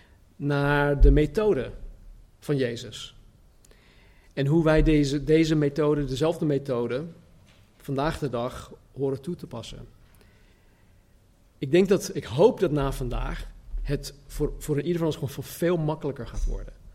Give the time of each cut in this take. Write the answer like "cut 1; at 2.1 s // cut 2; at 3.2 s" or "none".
none